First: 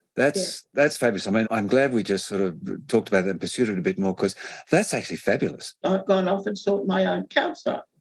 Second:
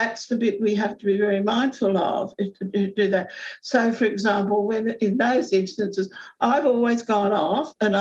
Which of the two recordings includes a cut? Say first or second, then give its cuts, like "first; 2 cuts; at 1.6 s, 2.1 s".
first; 2 cuts; at 1.4 s, 5.8 s